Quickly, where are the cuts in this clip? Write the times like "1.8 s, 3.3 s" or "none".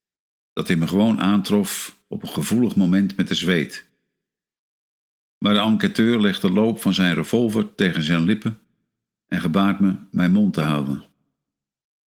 none